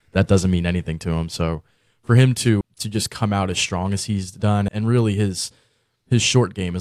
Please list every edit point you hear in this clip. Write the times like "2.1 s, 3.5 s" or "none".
2.6 s, 4.7 s